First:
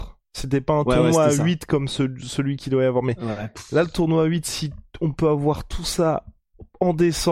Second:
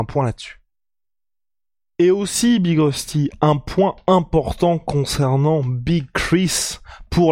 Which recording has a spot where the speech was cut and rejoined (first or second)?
second